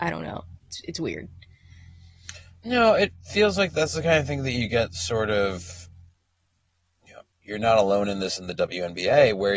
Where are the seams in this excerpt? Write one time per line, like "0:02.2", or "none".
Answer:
0:07.3